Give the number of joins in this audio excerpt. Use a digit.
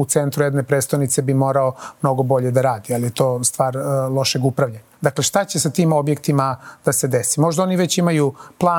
1